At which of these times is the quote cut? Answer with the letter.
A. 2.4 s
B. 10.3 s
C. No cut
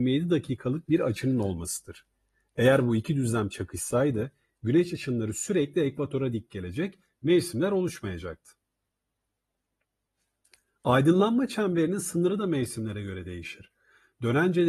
C